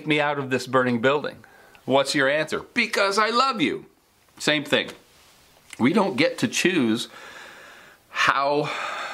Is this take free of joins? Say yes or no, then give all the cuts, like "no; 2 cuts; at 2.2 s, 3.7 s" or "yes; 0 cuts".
yes; 0 cuts